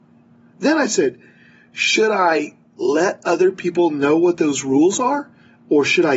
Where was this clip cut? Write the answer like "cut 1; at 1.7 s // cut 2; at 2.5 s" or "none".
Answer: none